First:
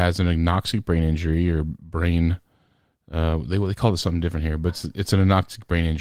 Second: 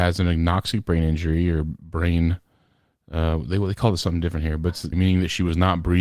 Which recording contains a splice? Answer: second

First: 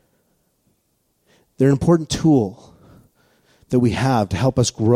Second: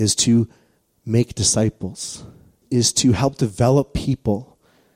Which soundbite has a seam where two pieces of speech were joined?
second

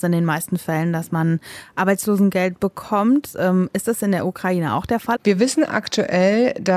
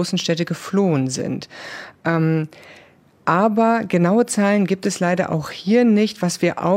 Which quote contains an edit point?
first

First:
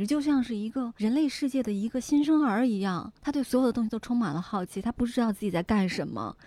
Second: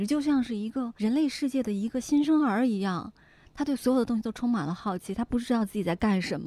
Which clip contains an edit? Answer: first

